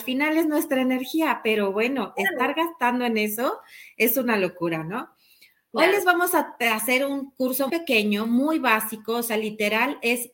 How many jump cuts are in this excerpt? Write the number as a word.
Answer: one